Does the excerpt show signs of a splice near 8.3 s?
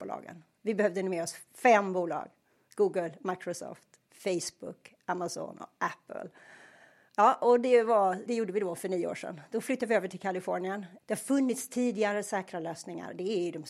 yes; 2 cuts; at 8.3 s, 11.0 s

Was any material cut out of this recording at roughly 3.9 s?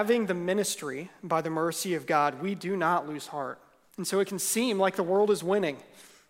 yes; 1 cut; at 3.9 s

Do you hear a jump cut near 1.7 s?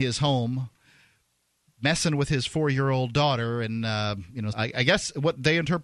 no; 1 cut; at 4.5 s

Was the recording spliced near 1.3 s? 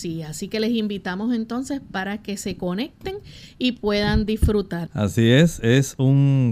no; 1 cut; at 4.9 s

